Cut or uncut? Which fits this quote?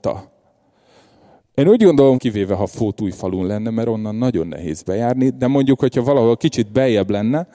cut